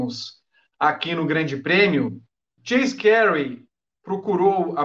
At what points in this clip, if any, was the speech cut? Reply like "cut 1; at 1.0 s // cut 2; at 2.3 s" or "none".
cut 1; at 2.6 s